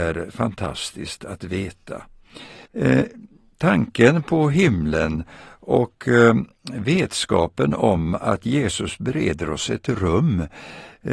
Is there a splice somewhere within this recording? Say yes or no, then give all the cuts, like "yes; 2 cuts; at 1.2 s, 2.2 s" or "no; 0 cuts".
yes; 1 cut; at 2.7 s